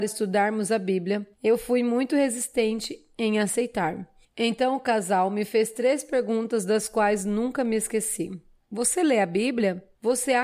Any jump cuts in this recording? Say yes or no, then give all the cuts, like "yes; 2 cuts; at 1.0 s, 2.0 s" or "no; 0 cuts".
no; 0 cuts